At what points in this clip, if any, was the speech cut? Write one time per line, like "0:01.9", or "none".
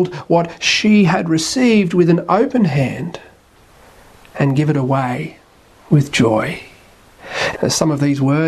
0:07.5